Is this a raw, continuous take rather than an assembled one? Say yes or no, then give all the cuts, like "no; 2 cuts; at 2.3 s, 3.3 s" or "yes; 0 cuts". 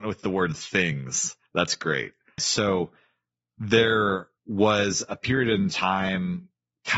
no; 2 cuts; at 2.4 s, 4.4 s